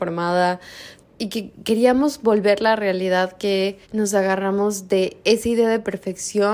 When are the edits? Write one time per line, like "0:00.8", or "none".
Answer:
0:01.0
0:03.8